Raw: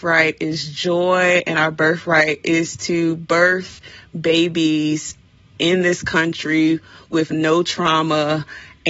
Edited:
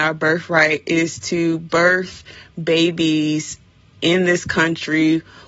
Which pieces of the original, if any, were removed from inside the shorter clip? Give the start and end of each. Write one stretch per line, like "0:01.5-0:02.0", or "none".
none